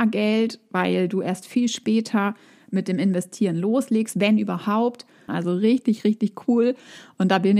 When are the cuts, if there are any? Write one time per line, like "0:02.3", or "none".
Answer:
0:05.3